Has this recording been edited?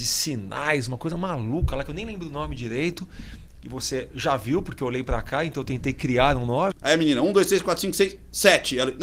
yes; 1 cut; at 6.7 s

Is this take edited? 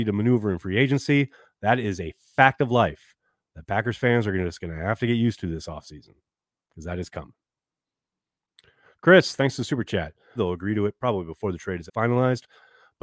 yes; 2 cuts; at 10.4 s, 11.9 s

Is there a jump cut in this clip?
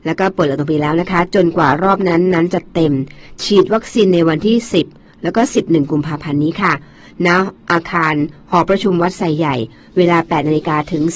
no; 0 cuts

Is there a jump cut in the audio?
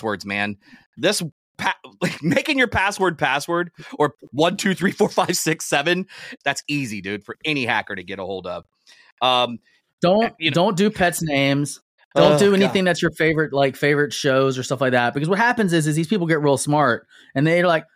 yes; 2 cuts; at 6.4 s, 12.0 s

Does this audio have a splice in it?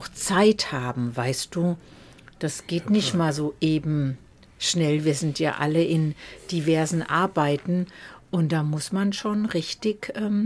no; 0 cuts

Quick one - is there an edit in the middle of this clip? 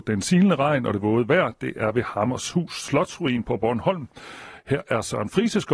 no; 0 cuts

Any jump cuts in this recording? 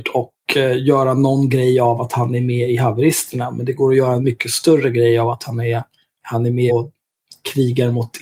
yes; 1 cut; at 6.7 s

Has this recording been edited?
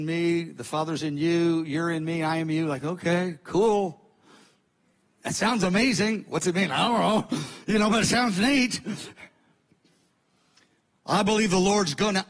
no; 0 cuts

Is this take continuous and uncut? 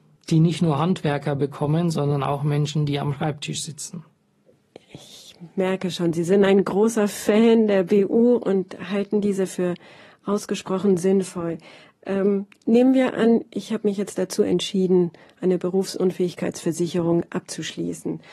yes; 0 cuts

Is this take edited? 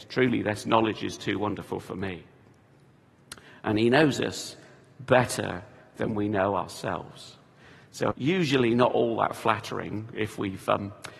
yes; 1 cut; at 8.1 s

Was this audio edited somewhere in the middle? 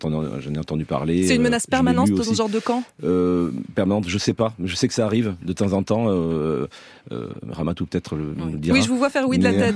no; 0 cuts

